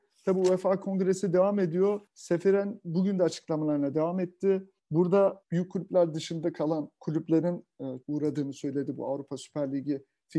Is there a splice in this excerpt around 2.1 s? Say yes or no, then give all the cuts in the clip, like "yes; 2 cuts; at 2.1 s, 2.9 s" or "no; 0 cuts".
no; 1 cut; at 8.0 s